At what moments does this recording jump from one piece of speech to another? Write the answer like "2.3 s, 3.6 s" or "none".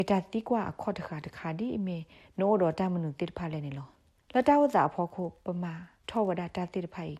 none